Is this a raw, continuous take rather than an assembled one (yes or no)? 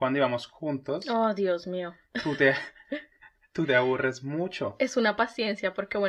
yes